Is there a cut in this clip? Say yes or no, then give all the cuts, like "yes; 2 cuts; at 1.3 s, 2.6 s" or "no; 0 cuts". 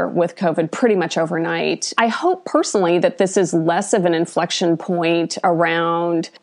yes; 1 cut; at 2.0 s